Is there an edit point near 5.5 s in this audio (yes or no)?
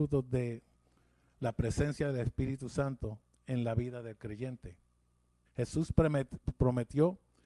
yes